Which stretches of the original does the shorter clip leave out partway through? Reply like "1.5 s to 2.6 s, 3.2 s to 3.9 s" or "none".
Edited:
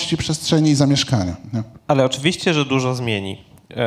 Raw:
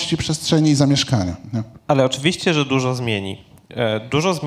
none